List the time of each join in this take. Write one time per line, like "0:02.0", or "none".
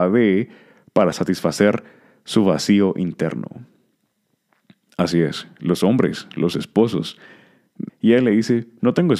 0:07.9